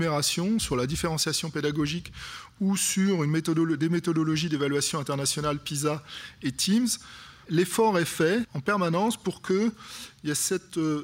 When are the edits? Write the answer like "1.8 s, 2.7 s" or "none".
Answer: 7.4 s